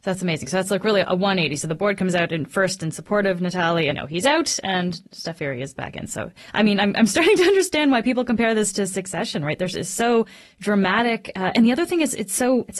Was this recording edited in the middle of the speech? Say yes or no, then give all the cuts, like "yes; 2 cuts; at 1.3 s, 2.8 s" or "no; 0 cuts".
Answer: yes; 1 cut; at 3.9 s